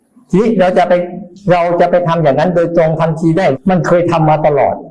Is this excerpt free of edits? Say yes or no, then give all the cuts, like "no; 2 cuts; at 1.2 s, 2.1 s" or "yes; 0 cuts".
no; 1 cut; at 3.5 s